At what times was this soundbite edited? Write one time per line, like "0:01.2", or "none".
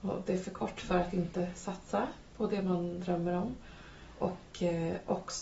none